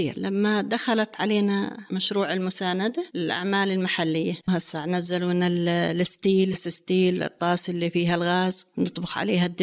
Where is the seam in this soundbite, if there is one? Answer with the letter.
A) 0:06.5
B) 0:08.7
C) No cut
A